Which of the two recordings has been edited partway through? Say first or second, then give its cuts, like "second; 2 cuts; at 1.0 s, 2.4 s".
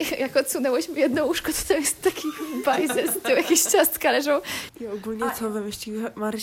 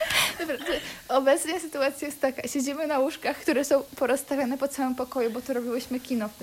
first; 1 cut; at 4.7 s